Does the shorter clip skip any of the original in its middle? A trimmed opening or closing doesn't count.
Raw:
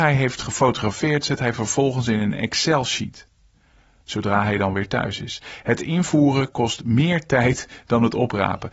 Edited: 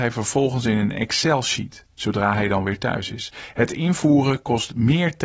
yes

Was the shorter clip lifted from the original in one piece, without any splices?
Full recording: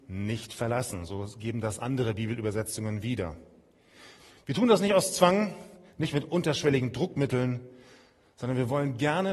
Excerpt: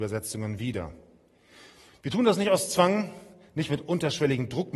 yes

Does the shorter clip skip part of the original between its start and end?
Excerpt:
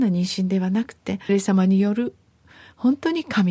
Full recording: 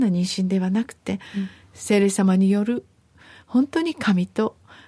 yes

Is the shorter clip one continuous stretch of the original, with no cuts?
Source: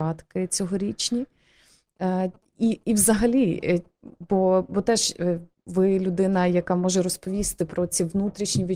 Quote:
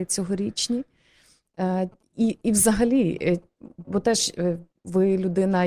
no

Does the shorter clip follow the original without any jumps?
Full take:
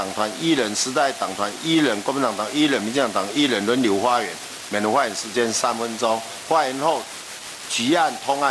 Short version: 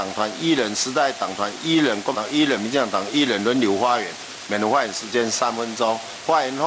no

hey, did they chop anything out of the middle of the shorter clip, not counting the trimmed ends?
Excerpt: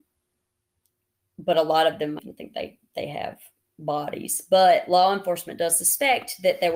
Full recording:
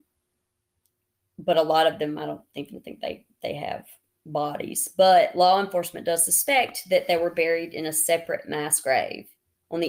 yes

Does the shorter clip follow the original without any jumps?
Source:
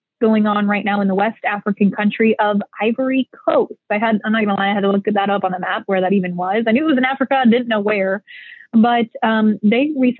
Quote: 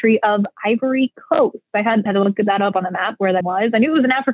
no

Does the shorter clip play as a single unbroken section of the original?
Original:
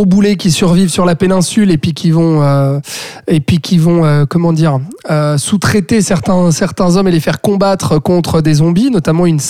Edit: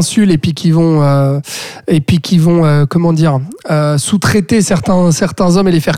yes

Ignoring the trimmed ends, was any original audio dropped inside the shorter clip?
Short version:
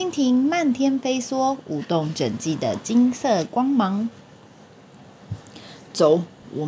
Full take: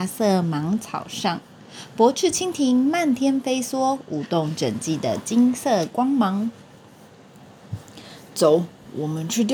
no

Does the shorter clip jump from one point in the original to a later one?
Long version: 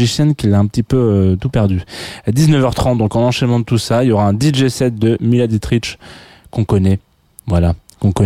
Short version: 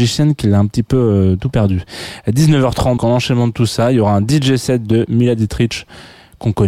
yes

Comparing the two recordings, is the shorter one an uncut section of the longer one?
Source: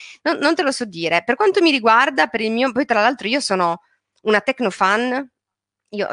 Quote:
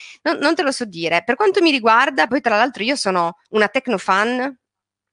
no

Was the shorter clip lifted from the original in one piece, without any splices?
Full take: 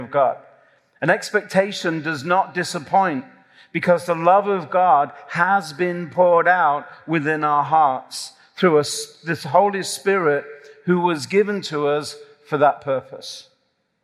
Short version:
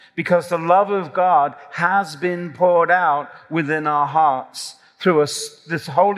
yes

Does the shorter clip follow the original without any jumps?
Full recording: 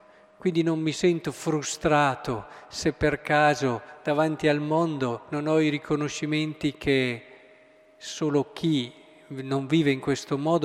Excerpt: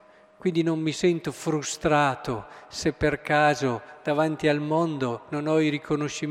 yes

